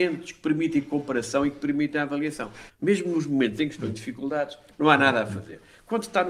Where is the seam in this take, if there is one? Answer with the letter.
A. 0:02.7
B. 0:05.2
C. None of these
A